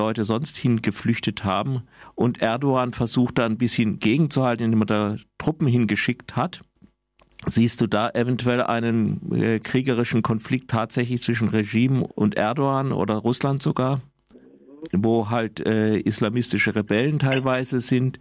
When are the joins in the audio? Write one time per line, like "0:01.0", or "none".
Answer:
0:12.1
0:14.8